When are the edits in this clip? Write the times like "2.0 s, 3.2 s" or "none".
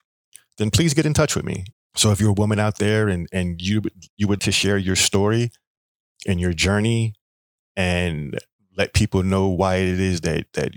1.7 s, 4.4 s

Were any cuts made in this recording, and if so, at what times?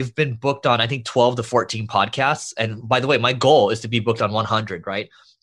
none

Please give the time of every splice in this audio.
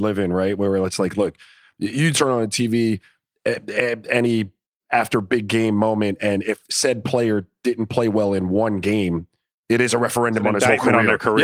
none

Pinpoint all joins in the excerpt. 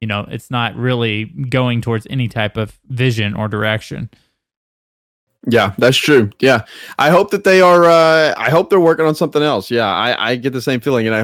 none

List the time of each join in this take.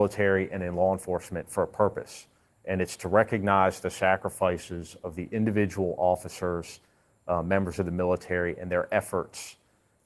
none

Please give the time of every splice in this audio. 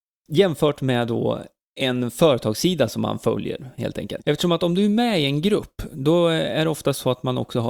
4.2 s

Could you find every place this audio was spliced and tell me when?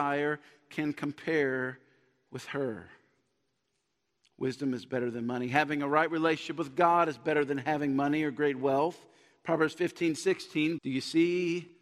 10.8 s

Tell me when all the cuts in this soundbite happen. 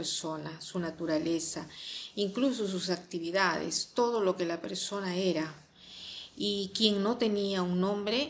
none

